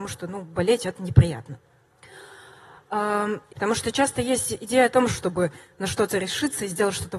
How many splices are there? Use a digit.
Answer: 2